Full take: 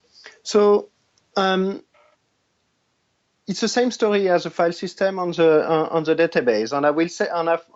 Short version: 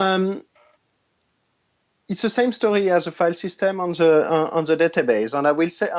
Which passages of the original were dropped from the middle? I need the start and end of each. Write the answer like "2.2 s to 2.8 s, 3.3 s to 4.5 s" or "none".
none

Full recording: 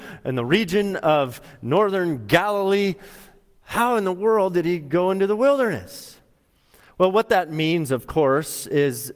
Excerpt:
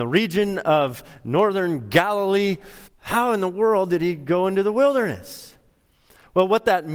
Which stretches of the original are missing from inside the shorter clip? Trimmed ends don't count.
3.2 s to 3.5 s

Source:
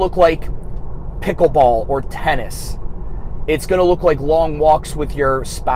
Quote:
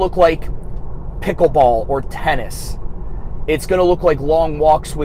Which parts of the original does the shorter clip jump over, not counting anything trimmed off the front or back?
none

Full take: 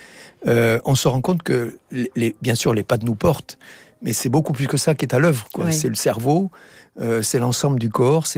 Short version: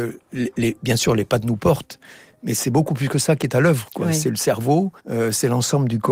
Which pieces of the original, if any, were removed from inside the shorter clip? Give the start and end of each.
6.6 s to 6.9 s

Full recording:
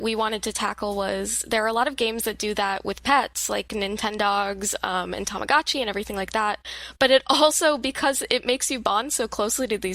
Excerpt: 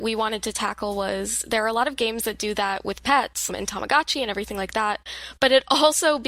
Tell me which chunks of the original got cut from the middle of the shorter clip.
3.5 s to 5.1 s

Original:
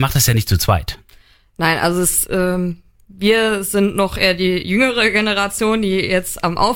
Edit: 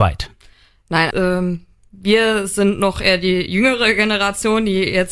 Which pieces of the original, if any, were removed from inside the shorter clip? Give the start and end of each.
1.8 s to 2.3 s

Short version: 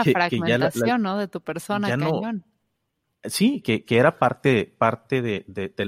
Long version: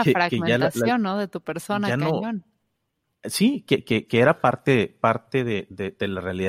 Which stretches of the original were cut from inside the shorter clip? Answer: 3.6 s to 3.8 s

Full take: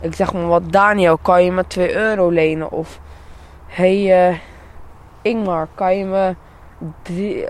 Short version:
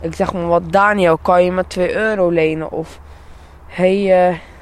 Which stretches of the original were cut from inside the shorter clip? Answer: none

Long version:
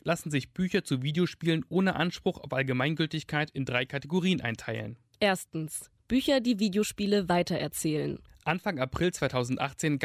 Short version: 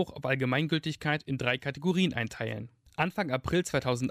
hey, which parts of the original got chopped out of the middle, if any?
5.1 s to 8.3 s

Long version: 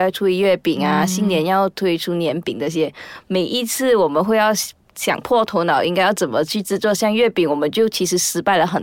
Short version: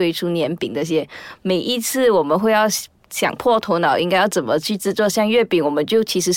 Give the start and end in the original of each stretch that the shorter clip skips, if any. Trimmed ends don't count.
none

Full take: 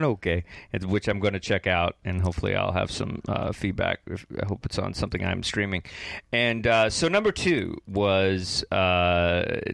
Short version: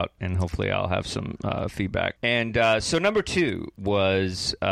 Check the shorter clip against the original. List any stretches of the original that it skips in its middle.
4.0 s to 6.3 s

